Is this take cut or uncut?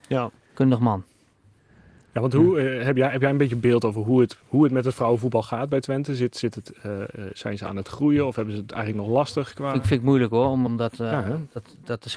cut